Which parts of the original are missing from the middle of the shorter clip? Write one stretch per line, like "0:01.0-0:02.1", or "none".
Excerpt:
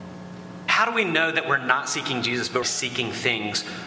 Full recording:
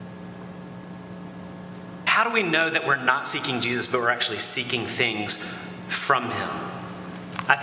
0:04.0-0:04.4